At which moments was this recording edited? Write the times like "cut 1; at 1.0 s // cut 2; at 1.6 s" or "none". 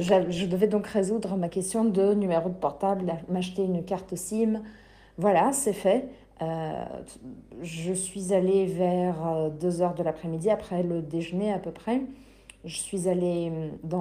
none